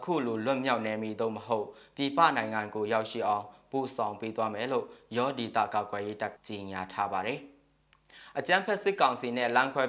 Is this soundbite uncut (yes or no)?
no